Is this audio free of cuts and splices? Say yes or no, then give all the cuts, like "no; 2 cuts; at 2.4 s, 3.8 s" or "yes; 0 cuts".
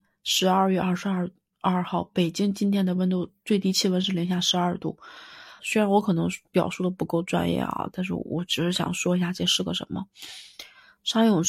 no; 1 cut; at 5.6 s